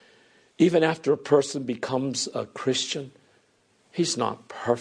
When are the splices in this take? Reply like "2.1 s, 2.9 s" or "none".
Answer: none